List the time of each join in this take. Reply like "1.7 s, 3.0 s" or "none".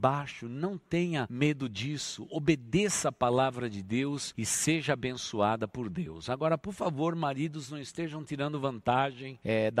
none